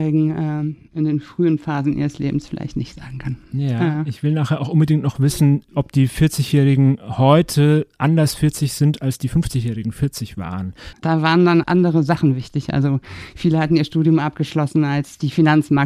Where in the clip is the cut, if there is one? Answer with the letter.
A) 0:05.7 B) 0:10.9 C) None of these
B